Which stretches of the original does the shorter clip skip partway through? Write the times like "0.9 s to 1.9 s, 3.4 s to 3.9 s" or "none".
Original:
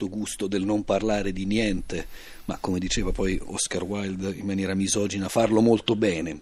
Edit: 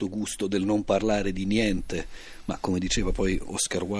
none